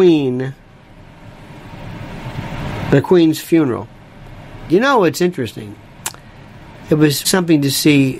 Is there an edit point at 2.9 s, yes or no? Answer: no